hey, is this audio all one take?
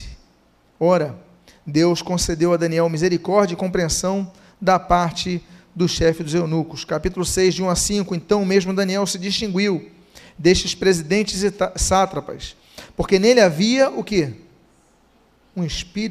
yes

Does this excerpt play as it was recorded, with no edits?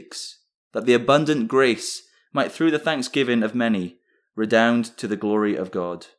yes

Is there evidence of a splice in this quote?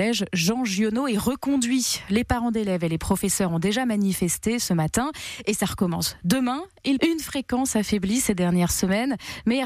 yes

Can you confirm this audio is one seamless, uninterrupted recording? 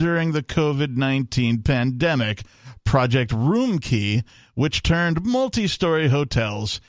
yes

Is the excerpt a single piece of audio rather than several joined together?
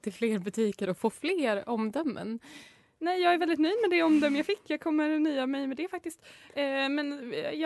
yes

